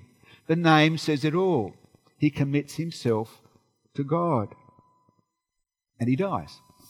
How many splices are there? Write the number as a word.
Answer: zero